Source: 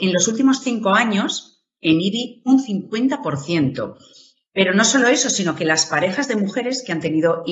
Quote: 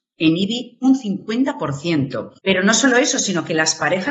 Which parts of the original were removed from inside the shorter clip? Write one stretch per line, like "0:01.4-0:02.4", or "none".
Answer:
0:04.0-0:04.5